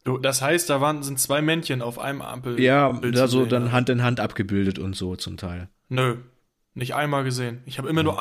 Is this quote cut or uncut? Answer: uncut